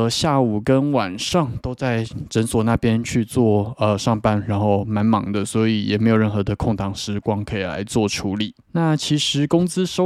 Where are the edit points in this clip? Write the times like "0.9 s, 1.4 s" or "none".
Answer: 8.6 s